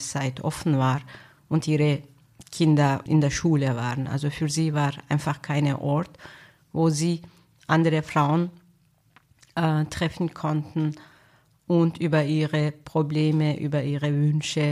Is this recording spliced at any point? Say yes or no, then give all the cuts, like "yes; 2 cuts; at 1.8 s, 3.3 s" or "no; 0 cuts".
yes; 1 cut; at 3.1 s